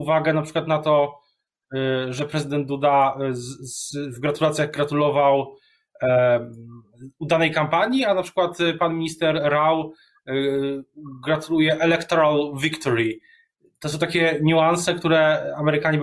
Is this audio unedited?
yes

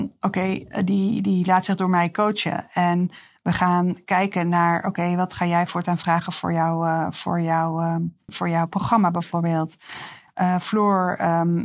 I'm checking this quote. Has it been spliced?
yes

